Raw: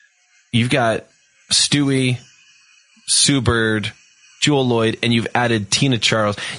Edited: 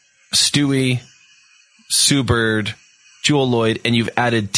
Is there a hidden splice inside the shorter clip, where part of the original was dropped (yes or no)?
no